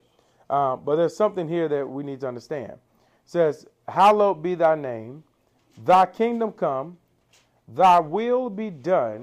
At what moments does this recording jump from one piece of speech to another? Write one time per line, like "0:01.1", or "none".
none